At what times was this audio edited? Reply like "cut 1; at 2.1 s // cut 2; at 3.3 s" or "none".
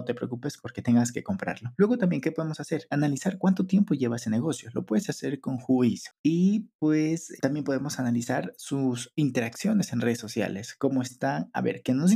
cut 1; at 6.1 s